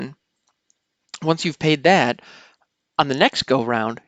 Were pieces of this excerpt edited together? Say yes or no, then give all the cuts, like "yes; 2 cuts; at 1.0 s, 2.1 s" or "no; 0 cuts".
no; 0 cuts